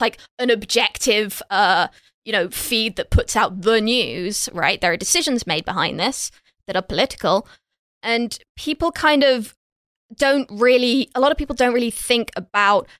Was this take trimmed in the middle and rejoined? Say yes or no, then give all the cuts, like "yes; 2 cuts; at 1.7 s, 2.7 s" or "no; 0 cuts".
no; 0 cuts